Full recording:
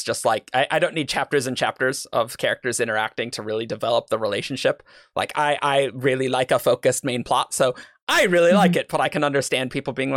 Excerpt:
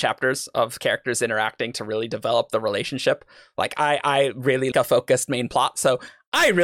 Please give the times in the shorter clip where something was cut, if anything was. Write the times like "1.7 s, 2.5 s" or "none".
4.7 s